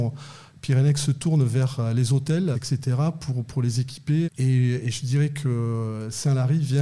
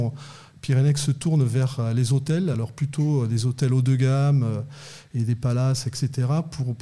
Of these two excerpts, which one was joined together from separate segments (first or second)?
first